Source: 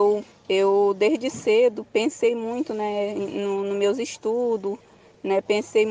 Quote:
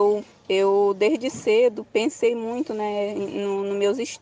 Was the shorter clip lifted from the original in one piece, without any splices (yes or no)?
yes